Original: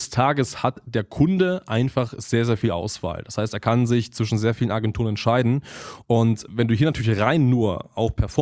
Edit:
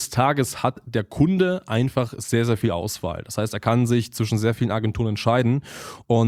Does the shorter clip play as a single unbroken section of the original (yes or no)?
yes